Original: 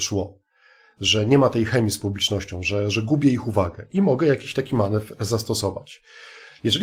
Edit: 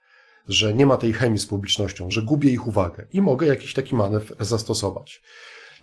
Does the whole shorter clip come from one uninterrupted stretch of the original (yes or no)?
no